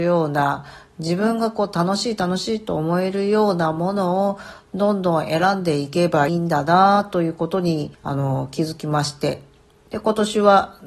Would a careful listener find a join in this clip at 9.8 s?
no; 2 cuts; at 6.3 s, 8.0 s

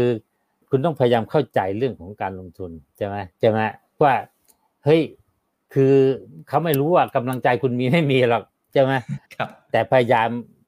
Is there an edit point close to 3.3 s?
yes; 2 cuts; at 3.3 s, 9.2 s

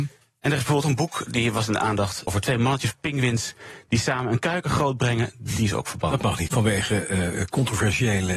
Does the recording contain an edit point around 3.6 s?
no; 2 cuts; at 2.3 s, 6.5 s

